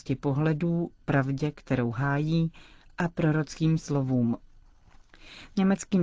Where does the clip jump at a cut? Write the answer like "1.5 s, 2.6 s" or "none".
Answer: none